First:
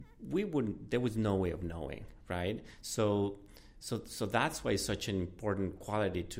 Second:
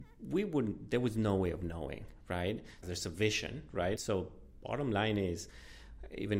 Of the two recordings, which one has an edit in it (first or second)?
second